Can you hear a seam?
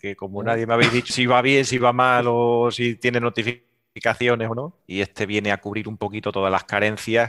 yes; 2 cuts; at 1.1 s, 4.8 s

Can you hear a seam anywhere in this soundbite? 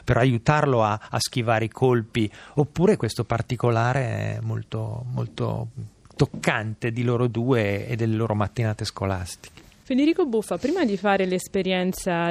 yes; 1 cut; at 6.1 s

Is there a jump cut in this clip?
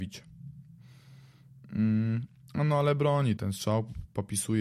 yes; 1 cut; at 3.4 s

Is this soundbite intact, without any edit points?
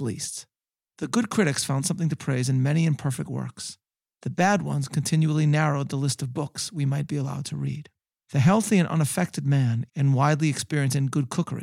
no; 1 cut; at 9.9 s

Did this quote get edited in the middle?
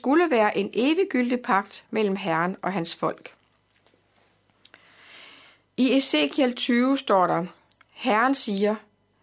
no; 0 cuts

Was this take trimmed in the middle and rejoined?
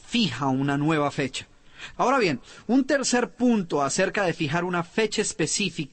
yes; 1 cut; at 1.9 s

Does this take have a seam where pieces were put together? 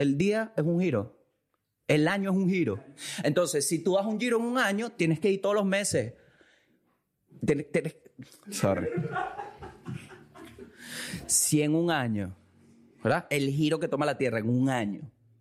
yes; 1 cut; at 8.4 s

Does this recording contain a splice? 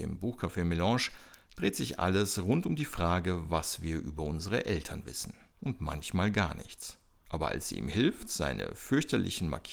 yes; 2 cuts; at 5.5 s, 7.3 s

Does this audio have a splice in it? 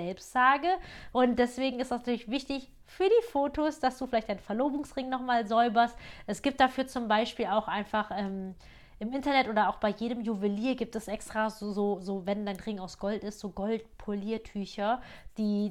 yes; 1 cut; at 1.1 s

